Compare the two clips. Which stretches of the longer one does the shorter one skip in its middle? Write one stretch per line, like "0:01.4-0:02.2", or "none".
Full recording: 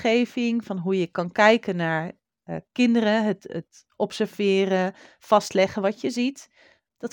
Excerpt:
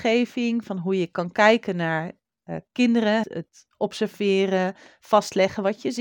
0:03.2-0:03.4